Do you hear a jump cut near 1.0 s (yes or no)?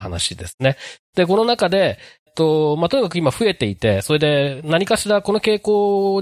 no